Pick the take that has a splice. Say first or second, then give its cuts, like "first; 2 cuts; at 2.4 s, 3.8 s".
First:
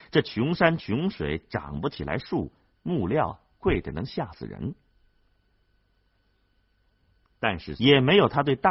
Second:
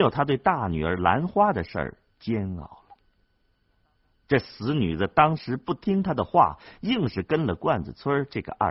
first; 1 cut; at 7.8 s